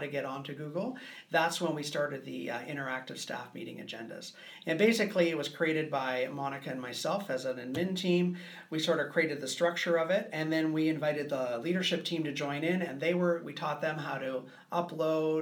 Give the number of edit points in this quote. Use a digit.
0